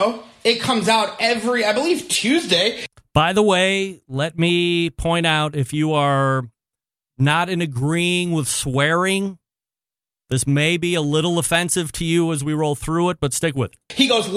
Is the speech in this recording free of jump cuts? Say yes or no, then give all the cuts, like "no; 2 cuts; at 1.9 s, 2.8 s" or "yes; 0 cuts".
yes; 0 cuts